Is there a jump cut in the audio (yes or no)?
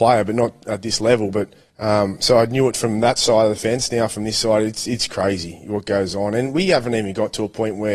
no